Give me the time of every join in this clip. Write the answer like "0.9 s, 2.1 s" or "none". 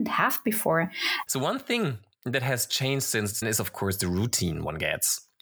1.3 s, 3.4 s